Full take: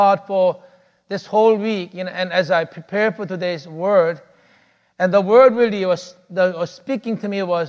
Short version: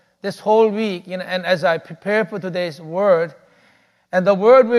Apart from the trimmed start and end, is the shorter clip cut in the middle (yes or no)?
no